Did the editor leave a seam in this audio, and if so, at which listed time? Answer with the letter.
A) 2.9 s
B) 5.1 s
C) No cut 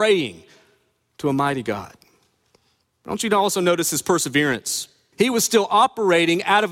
B